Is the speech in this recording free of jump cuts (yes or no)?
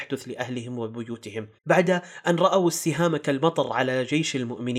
no